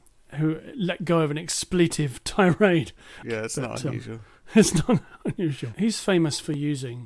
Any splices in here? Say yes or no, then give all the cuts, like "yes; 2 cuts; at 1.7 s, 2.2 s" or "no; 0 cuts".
yes; 2 cuts; at 3.2 s, 5.7 s